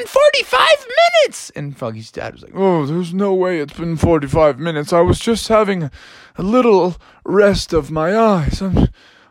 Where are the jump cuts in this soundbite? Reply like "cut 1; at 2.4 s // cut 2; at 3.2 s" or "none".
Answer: none